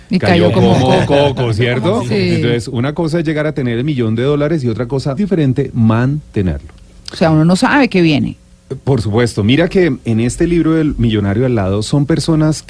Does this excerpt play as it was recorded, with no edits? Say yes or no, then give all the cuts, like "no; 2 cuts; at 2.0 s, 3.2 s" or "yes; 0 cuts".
no; 2 cuts; at 5.2 s, 7.0 s